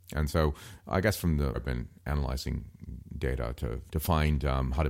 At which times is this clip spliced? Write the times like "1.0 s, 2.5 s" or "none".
1.5 s, 3.9 s